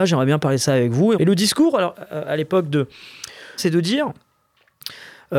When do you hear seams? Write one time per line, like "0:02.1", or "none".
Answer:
0:01.1
0:03.6